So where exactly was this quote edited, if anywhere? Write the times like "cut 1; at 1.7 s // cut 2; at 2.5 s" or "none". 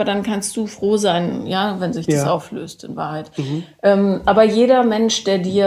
none